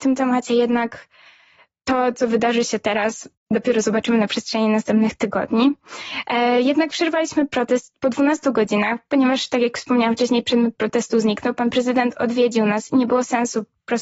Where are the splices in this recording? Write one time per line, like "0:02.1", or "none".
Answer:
none